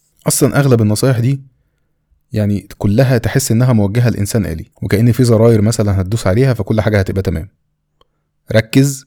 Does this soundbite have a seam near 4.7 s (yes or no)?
yes